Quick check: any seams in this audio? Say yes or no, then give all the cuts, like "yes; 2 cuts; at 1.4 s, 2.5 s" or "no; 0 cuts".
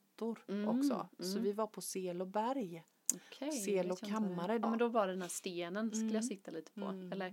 yes; 1 cut; at 4.6 s